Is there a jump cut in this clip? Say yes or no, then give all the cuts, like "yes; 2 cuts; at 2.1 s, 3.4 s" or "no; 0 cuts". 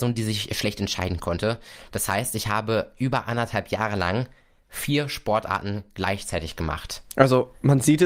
no; 0 cuts